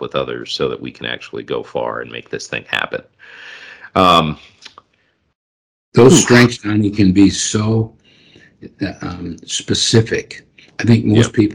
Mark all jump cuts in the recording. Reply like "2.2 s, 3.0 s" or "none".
none

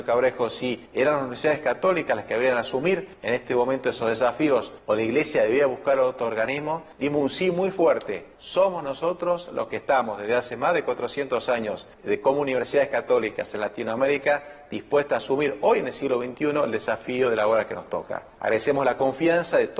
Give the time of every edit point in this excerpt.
none

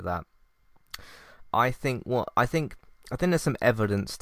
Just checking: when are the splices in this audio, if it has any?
1.5 s

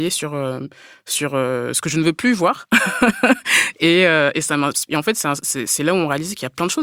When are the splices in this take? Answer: none

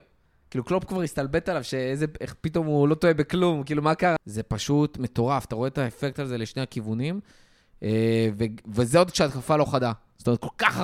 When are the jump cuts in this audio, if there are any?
4.2 s

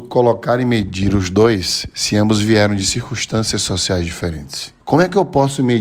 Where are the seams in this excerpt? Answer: 4.8 s

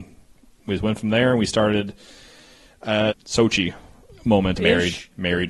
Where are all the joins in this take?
3.1 s, 4.6 s

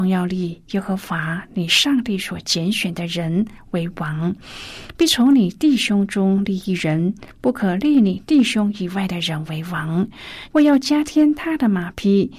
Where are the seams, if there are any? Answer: 10.5 s

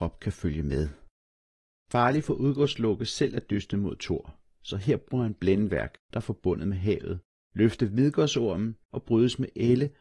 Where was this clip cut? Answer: 1.9 s, 6.1 s, 8.8 s

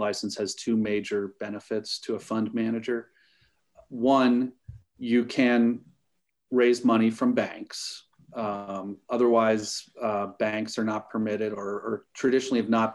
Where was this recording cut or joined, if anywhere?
none

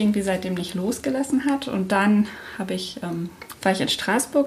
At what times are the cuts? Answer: 3.5 s

